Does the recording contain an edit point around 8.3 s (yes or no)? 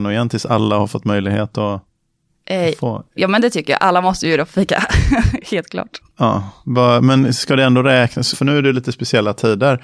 yes